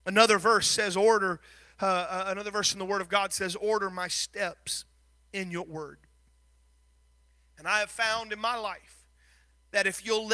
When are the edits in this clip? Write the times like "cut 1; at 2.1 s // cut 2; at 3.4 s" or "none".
none